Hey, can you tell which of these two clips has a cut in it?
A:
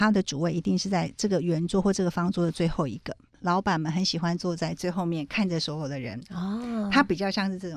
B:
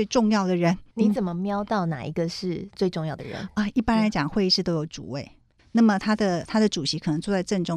B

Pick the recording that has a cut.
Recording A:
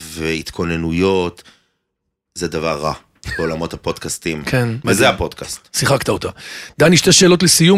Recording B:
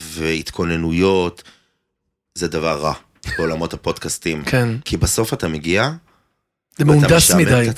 A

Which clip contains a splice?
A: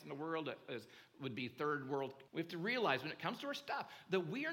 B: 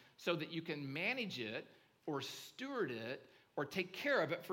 A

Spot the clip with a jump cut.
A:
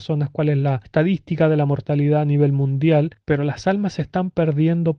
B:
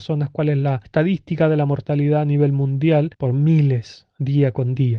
B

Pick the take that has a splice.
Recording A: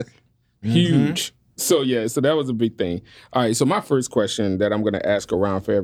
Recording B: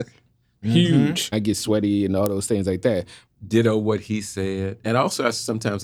B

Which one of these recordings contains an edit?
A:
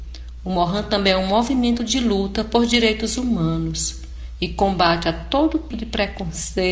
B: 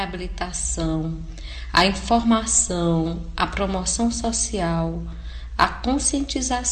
A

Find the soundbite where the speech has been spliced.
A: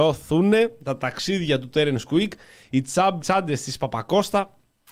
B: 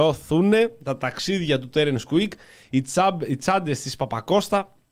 A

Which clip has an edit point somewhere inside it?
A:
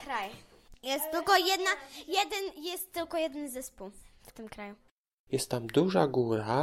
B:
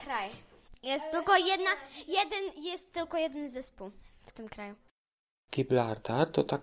A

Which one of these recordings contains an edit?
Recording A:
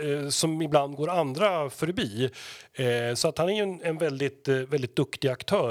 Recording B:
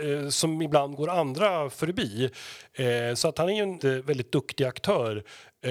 B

